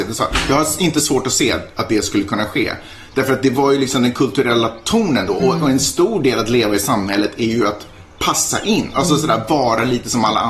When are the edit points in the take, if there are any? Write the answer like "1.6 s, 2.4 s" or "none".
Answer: none

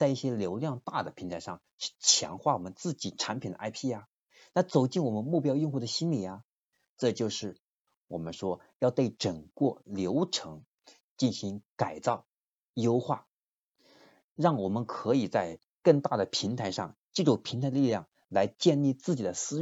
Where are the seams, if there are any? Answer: none

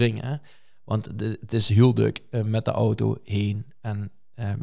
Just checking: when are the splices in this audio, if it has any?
none

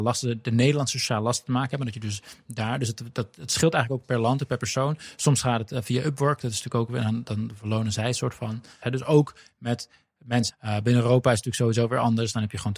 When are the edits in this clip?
8.8 s, 10.5 s

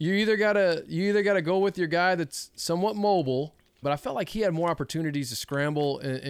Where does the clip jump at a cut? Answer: 3.8 s

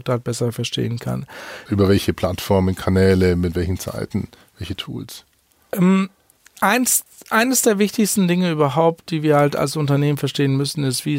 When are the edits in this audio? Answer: 1.7 s

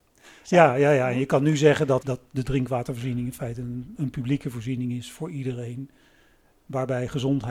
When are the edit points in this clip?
2.0 s

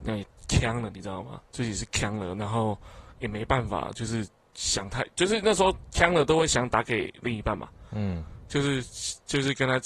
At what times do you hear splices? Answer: 1.5 s

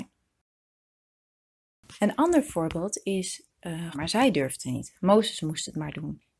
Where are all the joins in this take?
3.9 s

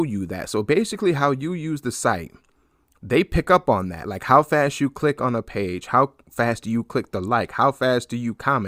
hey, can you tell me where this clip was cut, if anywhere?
none

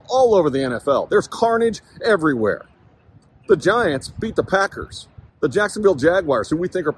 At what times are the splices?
5.3 s

